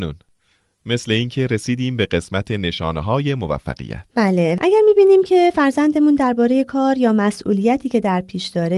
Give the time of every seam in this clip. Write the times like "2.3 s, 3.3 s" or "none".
4.1 s